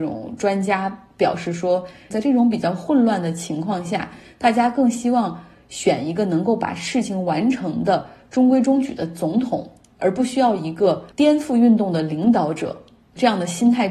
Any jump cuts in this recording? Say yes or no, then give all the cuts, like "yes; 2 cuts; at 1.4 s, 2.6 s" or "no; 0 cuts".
yes; 1 cut; at 2.1 s